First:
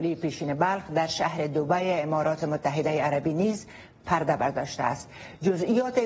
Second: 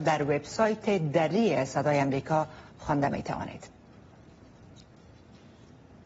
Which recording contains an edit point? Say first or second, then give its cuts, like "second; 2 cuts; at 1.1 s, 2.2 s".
second; 1 cut; at 2.7 s